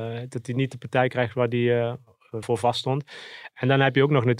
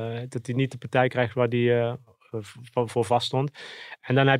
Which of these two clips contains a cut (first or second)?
first